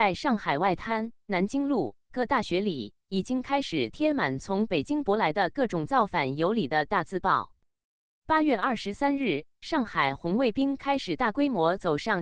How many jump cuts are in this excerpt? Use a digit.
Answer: 0